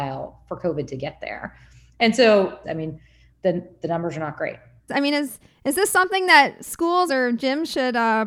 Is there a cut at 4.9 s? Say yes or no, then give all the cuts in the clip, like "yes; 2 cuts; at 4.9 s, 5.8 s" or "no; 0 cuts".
yes; 3 cuts; at 2.6 s, 4.9 s, 7.1 s